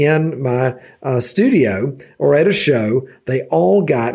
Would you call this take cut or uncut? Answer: uncut